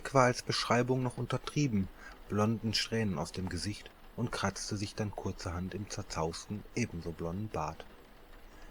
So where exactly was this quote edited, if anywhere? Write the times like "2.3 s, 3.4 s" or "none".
2.2 s